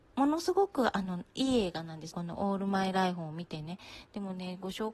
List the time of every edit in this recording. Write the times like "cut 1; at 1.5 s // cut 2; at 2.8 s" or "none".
cut 1; at 2.1 s